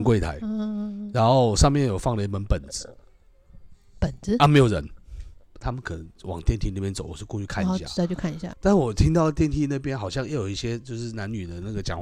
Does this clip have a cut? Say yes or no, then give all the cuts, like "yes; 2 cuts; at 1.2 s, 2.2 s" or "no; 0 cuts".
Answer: yes; 2 cuts; at 5.5 s, 8.5 s